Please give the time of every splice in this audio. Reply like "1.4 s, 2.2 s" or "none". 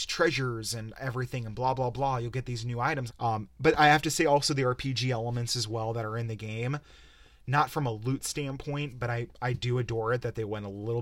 3.1 s

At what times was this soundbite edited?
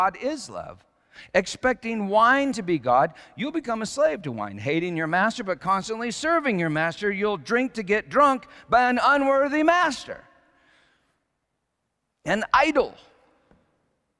none

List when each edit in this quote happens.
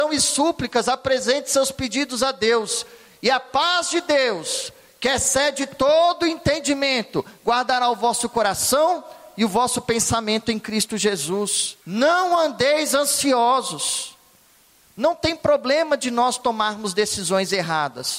11.8 s, 14.8 s

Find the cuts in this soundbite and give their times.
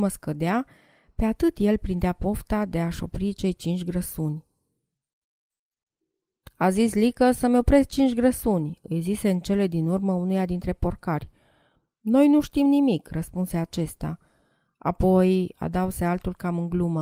none

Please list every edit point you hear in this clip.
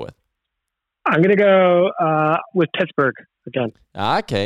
none

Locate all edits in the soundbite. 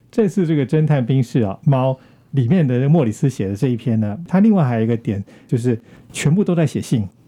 none

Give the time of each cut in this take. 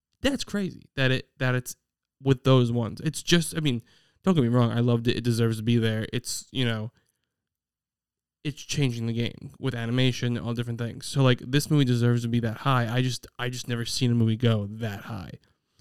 none

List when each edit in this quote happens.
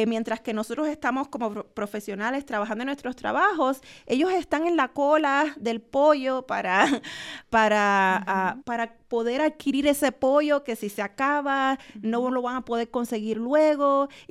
8.6 s

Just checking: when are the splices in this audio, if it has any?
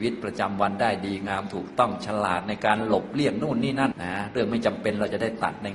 3.9 s

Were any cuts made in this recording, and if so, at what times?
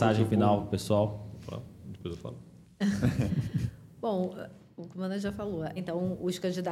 5.8 s

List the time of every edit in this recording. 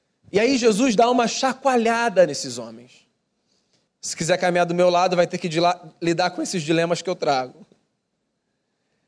3.9 s

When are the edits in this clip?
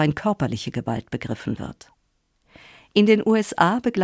none

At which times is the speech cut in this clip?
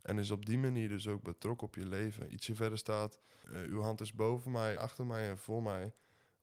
3.4 s, 4.8 s

